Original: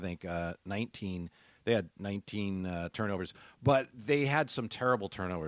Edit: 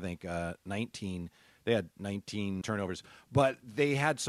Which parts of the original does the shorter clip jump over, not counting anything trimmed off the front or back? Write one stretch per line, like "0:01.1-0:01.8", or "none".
0:02.6-0:02.9